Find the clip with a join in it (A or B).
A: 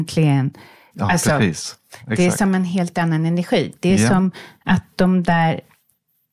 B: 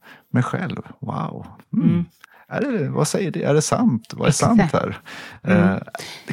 A